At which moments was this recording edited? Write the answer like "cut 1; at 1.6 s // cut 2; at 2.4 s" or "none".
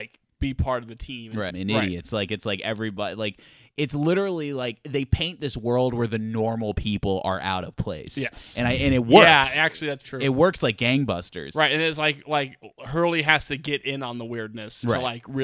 cut 1; at 1.5 s // cut 2; at 10.0 s